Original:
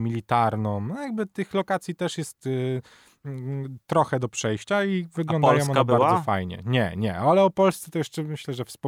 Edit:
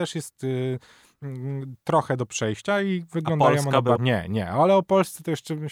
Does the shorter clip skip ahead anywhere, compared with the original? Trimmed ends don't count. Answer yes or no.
yes